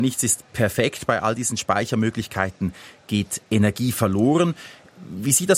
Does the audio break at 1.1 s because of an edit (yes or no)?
no